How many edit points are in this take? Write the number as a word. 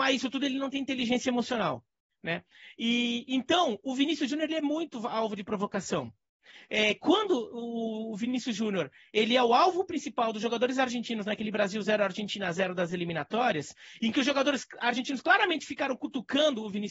zero